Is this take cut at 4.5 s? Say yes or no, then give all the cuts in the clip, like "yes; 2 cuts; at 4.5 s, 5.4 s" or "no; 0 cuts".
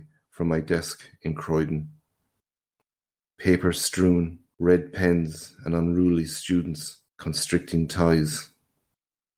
yes; 2 cuts; at 4.5 s, 7.1 s